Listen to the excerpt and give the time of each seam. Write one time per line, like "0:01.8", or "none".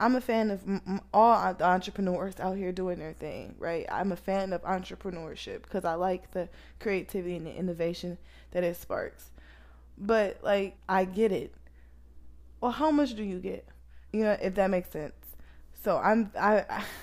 0:10.8
0:14.1